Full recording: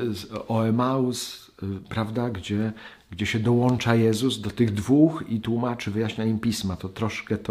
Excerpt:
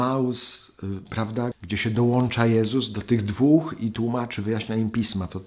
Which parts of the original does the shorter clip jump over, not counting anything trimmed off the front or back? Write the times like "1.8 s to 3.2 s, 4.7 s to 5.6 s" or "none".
2.3 s to 3.0 s

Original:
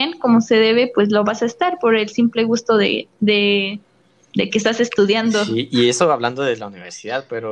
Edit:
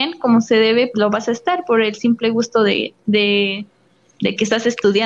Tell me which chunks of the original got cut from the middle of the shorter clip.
0.9 s to 1.1 s

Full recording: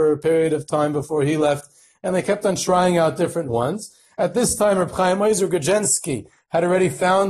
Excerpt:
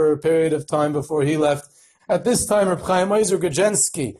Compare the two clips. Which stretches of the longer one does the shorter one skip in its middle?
2.0 s to 4.1 s

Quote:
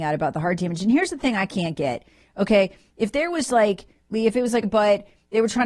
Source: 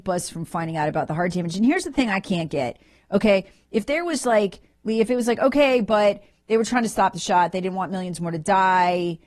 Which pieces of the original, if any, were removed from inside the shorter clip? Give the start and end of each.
5.4 s to 5.8 s

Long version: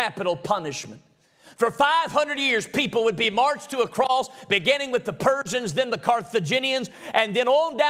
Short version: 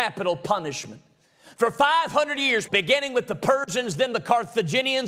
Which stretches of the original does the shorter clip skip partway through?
2.7 s to 4.5 s

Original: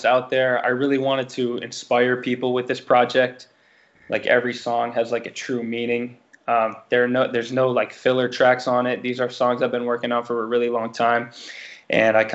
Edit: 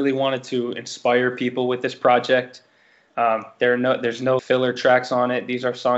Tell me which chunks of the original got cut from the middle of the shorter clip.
3.9 s to 6.4 s, 7.7 s to 7.9 s

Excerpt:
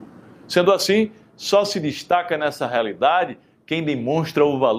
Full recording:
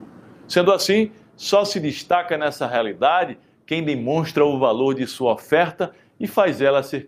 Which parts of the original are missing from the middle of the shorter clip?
none

